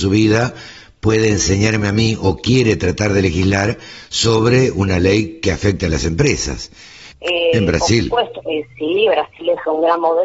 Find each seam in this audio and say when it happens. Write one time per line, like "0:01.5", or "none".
0:07.1
0:08.4

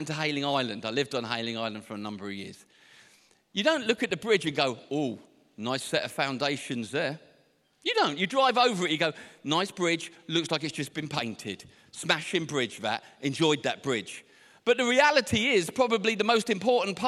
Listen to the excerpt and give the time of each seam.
none

